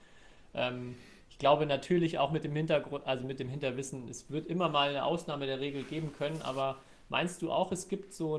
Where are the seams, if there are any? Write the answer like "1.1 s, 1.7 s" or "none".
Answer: none